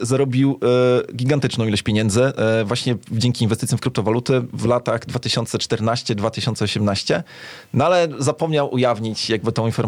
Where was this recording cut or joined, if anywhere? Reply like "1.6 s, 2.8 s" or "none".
none

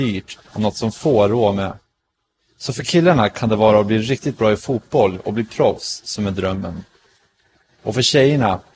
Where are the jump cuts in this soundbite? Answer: none

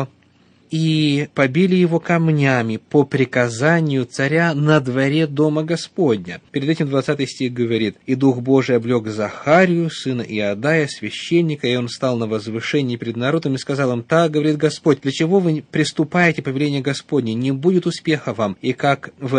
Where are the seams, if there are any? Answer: none

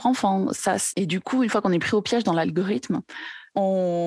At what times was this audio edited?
0.9 s

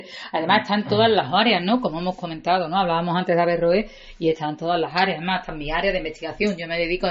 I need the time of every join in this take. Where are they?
none

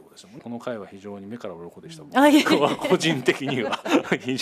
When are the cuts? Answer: none

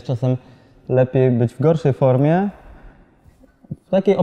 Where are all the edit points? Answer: none

